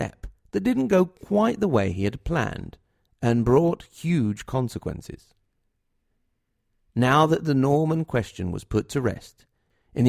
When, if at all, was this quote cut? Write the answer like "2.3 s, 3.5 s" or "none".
none